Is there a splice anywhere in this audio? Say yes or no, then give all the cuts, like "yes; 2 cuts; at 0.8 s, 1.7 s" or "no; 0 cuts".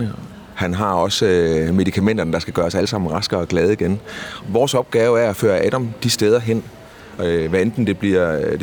yes; 2 cuts; at 4.4 s, 7.2 s